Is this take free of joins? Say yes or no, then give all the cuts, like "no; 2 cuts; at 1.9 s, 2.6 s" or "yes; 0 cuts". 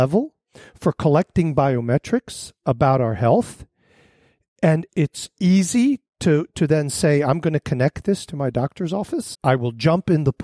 no; 2 cuts; at 4.9 s, 9.3 s